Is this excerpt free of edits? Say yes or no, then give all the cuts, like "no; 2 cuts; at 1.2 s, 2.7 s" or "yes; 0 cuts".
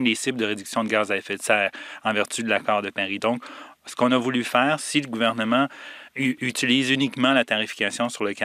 no; 3 cuts; at 3.2 s, 4.8 s, 6.1 s